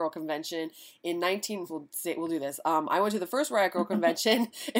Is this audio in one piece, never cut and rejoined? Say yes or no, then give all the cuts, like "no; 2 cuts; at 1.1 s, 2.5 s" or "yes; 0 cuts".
no; 1 cut; at 1.7 s